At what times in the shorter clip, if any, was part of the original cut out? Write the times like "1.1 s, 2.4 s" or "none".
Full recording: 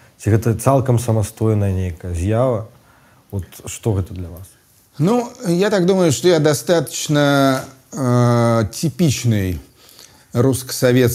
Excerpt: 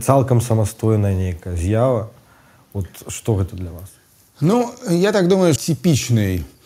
5.6 s